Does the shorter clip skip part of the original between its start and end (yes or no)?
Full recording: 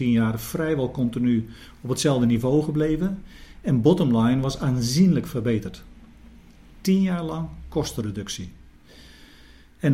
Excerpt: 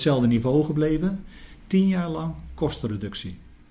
yes